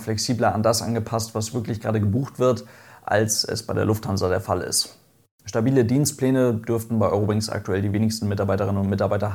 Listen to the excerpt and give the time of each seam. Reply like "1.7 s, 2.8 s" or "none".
none